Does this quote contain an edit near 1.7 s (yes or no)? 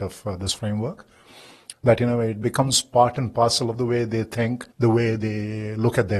yes